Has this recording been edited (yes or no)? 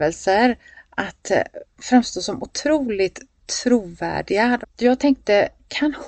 yes